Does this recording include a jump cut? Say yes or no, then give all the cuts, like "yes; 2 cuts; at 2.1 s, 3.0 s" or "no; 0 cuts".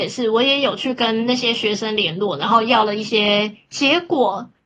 yes; 1 cut; at 3.7 s